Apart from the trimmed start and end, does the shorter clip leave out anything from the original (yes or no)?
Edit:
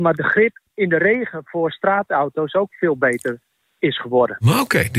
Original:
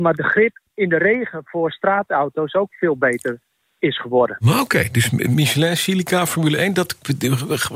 no